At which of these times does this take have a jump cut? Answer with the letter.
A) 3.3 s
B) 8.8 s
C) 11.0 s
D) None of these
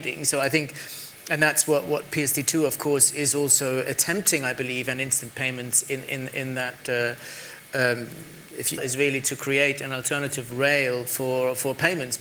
B